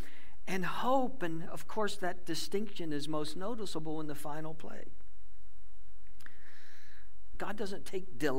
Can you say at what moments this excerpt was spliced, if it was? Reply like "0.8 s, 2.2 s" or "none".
7.3 s